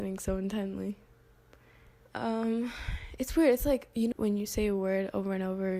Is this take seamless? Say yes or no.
no